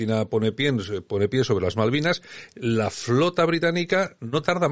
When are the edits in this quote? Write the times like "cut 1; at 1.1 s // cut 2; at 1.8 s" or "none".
none